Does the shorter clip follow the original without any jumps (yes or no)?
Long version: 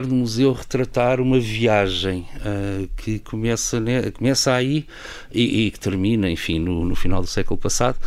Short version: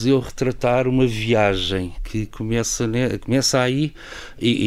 no